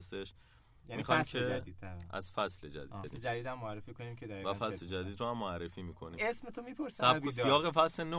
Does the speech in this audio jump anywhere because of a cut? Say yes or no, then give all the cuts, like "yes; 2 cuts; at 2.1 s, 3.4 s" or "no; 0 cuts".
yes; 2 cuts; at 3.0 s, 6.2 s